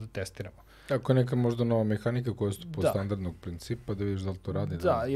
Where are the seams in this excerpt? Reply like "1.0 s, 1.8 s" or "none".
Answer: none